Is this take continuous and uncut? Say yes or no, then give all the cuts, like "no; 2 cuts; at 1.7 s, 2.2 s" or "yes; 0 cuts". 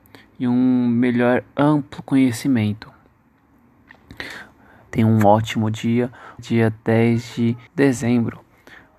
no; 3 cuts; at 4.9 s, 6.4 s, 7.7 s